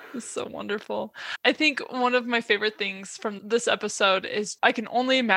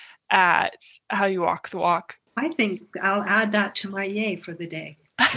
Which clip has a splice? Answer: second; 1 cut; at 2.3 s

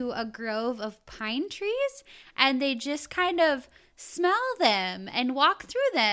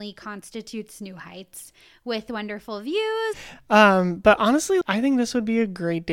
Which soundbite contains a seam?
second; 2 cuts; at 3.3 s, 4.8 s

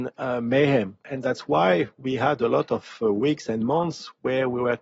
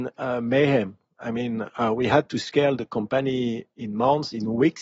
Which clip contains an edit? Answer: first; 1 cut; at 1.0 s

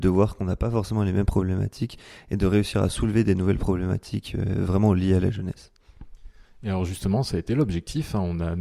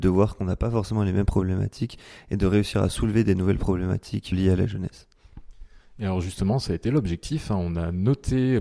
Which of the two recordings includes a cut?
second; 1 cut; at 4.3 s

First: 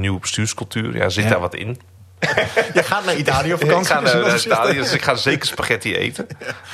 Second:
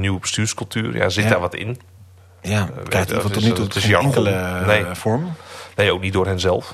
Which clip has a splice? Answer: first; 1 cut; at 2.2 s

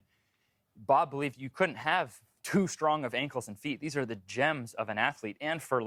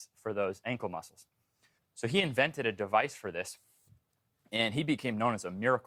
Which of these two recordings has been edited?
second; 1 cut; at 1.8 s

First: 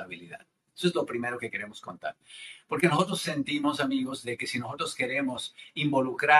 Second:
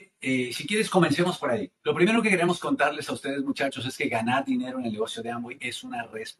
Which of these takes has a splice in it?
second; 1 cut; at 1.8 s

